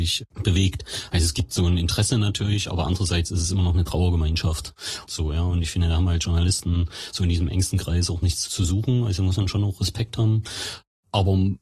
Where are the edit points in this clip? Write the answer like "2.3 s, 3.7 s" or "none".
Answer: 5.1 s